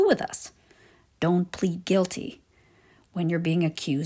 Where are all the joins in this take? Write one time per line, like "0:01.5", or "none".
none